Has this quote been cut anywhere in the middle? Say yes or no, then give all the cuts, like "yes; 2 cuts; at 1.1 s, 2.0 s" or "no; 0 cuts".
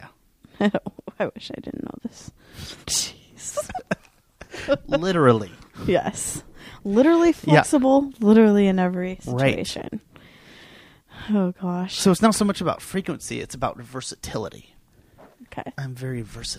yes; 1 cut; at 2.8 s